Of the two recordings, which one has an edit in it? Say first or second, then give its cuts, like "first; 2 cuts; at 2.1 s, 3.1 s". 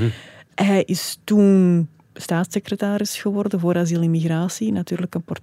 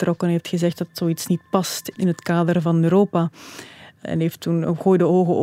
second; 1 cut; at 2.6 s